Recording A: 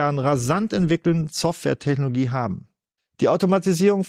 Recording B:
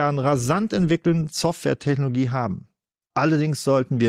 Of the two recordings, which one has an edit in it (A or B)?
A